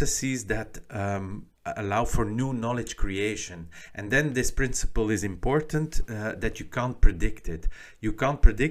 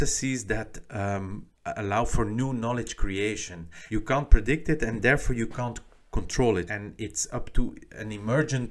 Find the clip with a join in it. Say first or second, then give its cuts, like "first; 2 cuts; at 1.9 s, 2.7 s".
second; 2 cuts; at 3.9 s, 6.7 s